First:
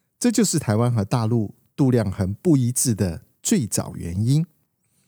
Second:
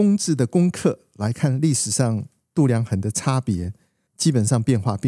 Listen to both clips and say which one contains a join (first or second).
second